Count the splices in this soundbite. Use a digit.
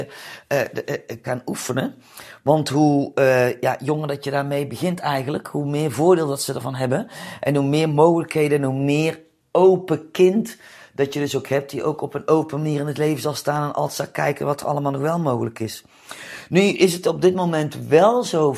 1